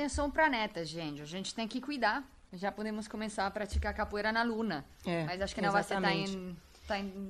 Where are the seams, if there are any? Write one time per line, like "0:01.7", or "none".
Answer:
0:02.5